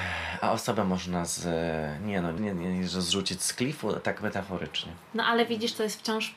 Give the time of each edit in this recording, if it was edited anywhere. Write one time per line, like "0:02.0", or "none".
0:02.4